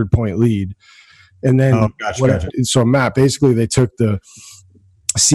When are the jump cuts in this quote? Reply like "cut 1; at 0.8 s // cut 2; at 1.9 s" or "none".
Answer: cut 1; at 2.5 s

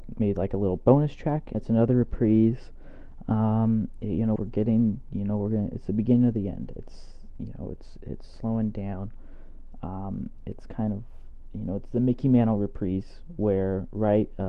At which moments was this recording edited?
cut 1; at 1.5 s // cut 2; at 4.4 s

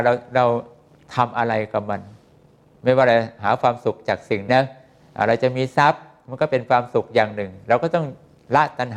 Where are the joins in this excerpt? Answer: cut 1; at 4.5 s

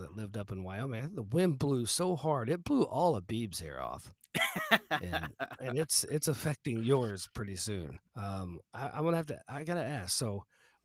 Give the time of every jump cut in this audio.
cut 1; at 8.1 s

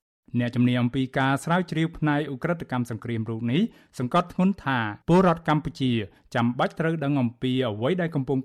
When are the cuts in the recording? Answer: cut 1; at 5.0 s

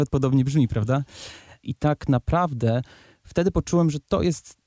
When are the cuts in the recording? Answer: cut 1; at 1.6 s

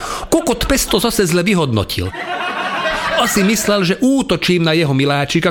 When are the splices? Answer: none

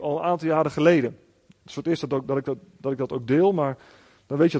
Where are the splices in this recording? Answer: none

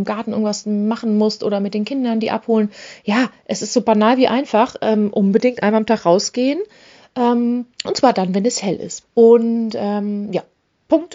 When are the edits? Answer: cut 1; at 7.7 s // cut 2; at 9.1 s

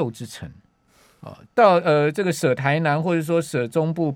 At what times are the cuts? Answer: cut 1; at 1.4 s

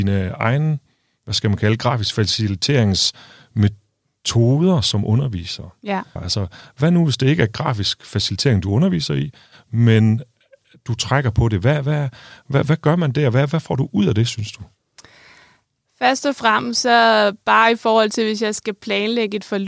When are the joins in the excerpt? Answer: cut 1; at 6.2 s

